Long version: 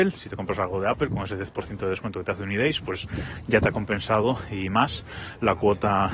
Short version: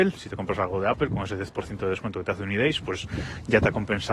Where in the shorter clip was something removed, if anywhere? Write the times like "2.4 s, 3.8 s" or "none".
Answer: none